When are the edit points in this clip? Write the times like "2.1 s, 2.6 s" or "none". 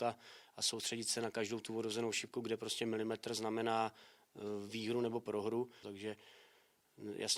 5.8 s

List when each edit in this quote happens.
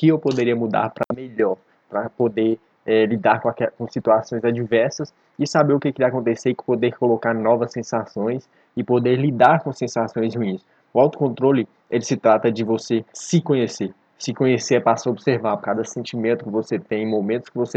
10.8 s, 13.1 s, 15.6 s

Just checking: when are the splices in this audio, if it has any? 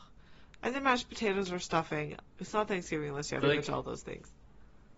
2.2 s, 3.4 s

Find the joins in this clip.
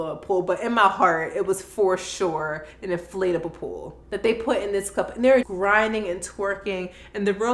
4.0 s, 5.4 s

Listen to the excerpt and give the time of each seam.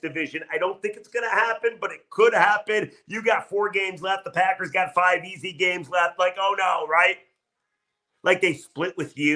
8.1 s

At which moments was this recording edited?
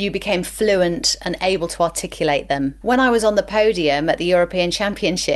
2.8 s

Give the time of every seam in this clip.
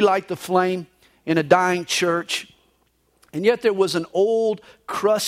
none

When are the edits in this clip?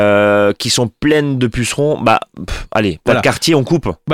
none

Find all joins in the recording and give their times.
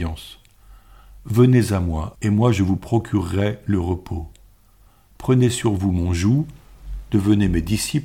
2.1 s

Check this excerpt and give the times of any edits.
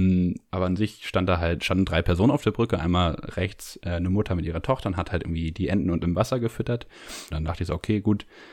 5.5 s, 7.3 s

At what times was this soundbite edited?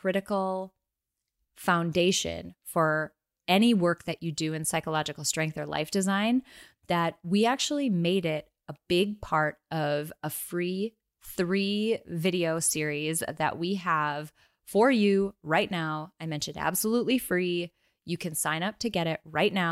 none

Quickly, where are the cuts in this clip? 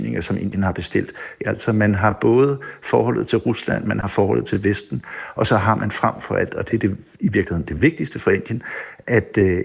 1.4 s

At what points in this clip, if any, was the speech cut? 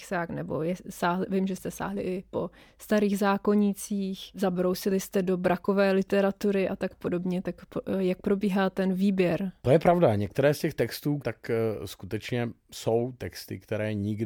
9.6 s, 11.2 s

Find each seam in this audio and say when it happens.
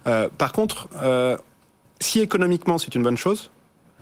none

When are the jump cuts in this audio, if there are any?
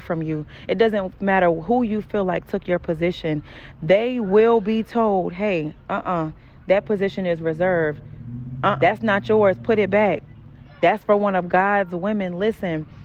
8.8 s, 10.7 s

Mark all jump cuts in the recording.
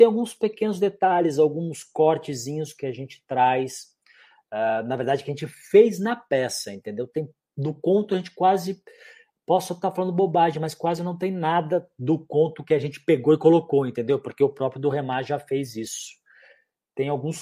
none

